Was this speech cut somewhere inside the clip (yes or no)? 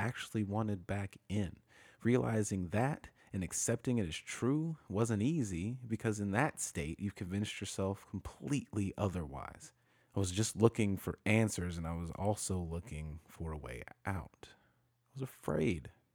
yes